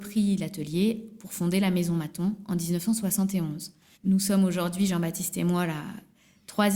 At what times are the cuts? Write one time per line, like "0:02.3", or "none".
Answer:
0:03.9